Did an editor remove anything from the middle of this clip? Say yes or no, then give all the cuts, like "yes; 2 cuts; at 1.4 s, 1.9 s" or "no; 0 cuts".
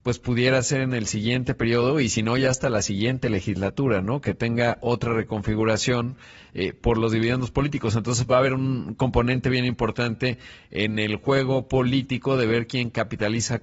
no; 0 cuts